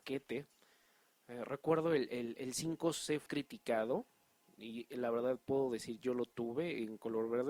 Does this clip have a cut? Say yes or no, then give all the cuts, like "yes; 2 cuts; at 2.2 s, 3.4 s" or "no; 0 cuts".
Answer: yes; 1 cut; at 3.3 s